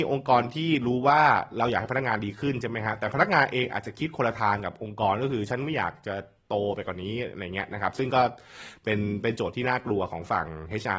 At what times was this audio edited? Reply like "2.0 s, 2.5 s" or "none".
none